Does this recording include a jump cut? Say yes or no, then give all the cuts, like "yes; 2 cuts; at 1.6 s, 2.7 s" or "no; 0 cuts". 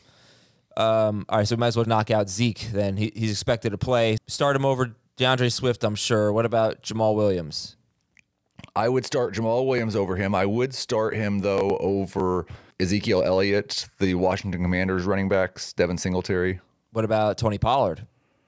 yes; 3 cuts; at 1.8 s, 4.2 s, 12.7 s